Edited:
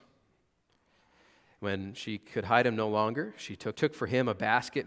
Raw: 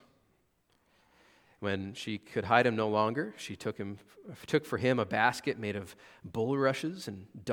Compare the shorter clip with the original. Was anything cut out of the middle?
yes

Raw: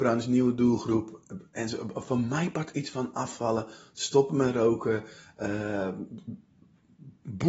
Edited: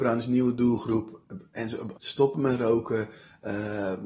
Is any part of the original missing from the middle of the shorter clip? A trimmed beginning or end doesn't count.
yes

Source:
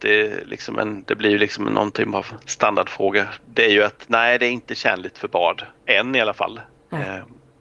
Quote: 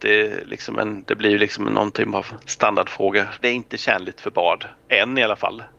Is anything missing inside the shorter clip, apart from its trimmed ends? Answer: yes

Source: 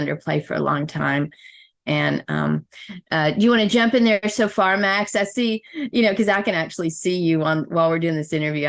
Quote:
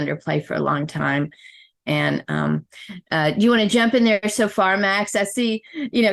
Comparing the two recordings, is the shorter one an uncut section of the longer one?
yes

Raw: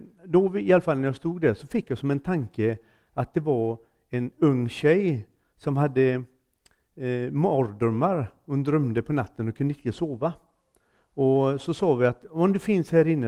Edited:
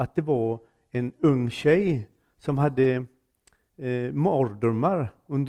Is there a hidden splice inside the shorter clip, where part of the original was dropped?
no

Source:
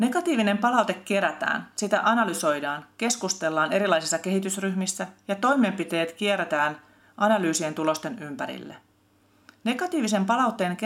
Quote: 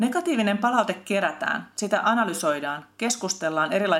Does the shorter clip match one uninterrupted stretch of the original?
yes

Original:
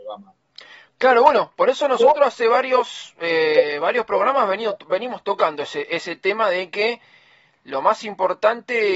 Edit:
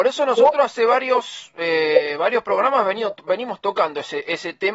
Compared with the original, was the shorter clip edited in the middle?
no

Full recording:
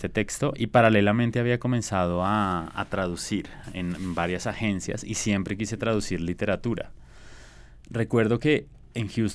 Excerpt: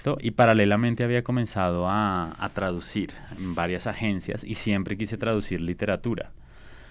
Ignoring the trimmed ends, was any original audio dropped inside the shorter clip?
yes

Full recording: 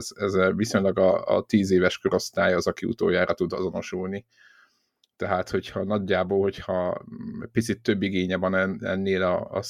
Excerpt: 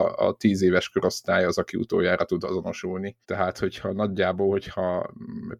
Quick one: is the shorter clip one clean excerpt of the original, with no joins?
no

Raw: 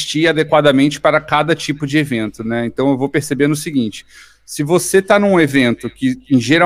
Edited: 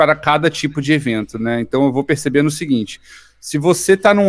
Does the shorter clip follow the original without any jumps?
yes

